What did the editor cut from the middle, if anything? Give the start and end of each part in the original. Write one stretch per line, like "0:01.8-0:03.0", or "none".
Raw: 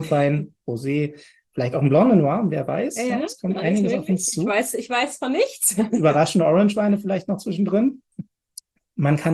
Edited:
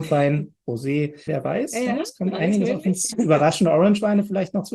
0:01.3-0:02.5
0:04.4-0:05.9